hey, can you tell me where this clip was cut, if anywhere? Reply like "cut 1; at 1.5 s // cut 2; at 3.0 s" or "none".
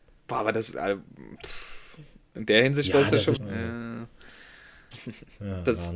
cut 1; at 3.4 s // cut 2; at 4.9 s